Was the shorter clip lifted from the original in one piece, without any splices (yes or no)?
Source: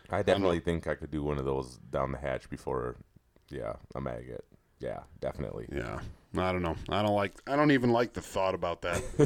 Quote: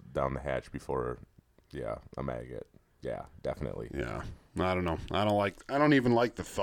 yes